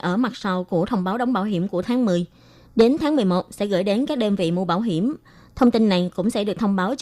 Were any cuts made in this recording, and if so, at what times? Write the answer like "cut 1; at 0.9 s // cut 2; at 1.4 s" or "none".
none